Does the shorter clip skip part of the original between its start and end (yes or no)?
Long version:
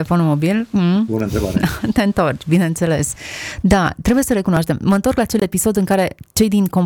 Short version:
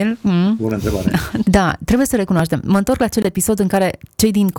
yes